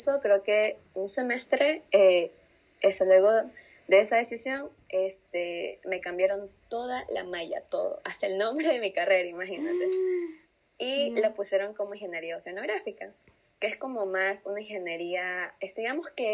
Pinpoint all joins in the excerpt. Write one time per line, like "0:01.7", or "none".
none